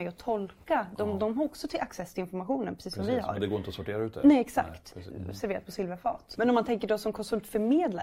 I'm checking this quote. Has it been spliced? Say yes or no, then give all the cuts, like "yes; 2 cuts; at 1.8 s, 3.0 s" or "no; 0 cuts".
yes; 2 cuts; at 5.1 s, 6.3 s